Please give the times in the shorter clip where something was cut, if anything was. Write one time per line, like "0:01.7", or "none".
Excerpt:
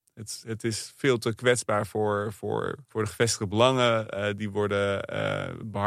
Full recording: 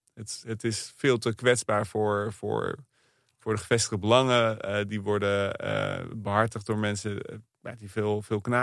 0:02.9